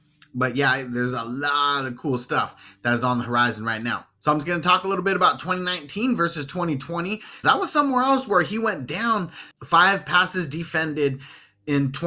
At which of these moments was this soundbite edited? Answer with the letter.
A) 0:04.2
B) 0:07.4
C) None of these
B